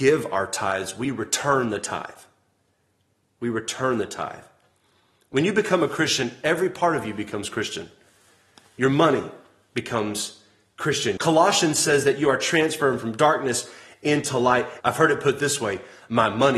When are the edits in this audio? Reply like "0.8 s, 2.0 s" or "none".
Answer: 11.2 s, 14.8 s